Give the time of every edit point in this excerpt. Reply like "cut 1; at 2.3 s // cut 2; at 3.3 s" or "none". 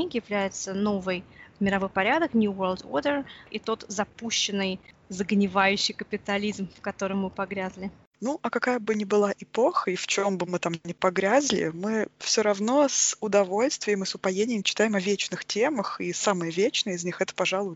none